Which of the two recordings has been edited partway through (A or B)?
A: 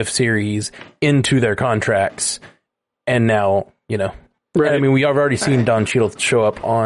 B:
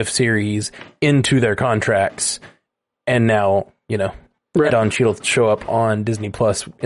B